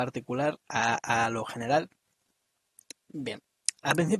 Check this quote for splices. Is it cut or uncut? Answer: cut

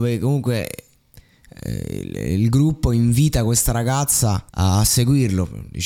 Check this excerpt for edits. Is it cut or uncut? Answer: cut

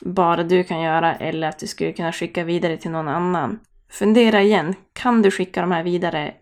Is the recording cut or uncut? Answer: uncut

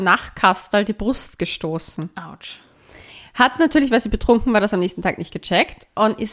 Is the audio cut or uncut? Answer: uncut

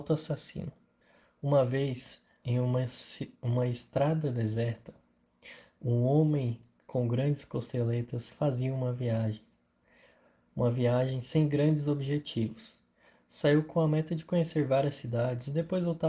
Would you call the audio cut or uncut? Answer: cut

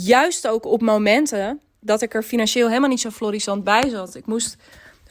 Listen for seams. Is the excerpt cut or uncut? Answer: uncut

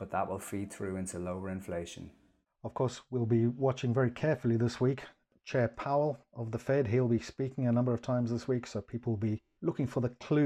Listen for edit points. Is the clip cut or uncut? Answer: uncut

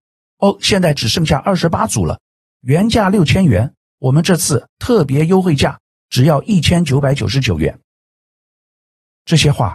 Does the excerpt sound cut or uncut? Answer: uncut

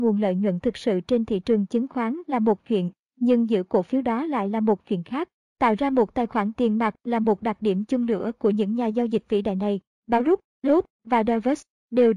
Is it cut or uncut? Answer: uncut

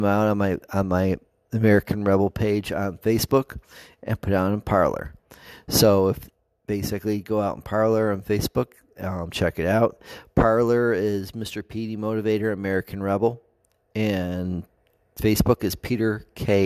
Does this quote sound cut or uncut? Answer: uncut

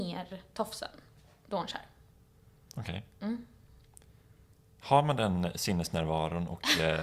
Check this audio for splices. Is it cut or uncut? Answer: uncut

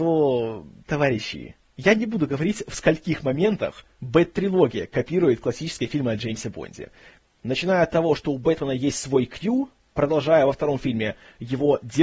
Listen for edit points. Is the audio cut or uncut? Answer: uncut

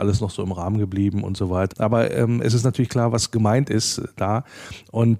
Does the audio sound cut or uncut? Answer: cut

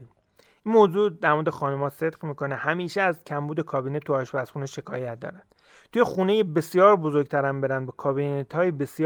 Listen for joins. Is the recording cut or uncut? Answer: uncut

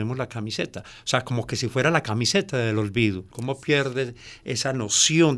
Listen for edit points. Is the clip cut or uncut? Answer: cut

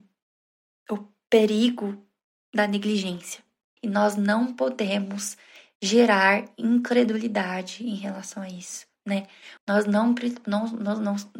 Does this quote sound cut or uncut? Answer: cut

